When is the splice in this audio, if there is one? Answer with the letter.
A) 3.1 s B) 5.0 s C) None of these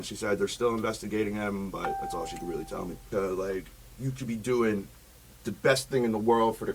A